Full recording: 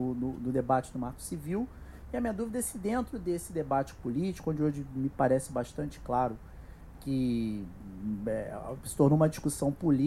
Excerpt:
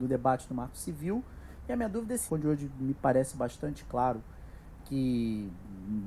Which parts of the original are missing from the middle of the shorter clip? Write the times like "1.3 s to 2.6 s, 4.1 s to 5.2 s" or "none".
2.7 s to 4.4 s